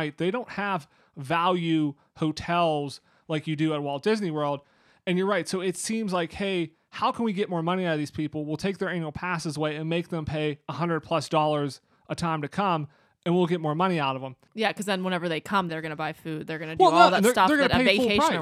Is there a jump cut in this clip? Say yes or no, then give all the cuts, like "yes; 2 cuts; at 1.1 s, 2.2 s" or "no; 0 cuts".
yes; 1 cut; at 15.7 s